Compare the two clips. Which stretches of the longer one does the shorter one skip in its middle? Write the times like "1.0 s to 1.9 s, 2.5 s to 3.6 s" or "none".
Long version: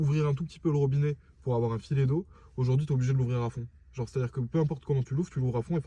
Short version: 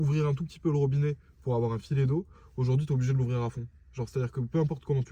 none